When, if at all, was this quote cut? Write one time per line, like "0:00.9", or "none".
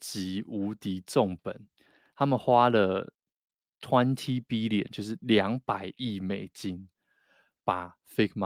none